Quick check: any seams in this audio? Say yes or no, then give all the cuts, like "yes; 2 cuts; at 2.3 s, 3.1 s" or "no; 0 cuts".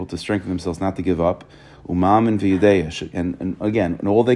no; 0 cuts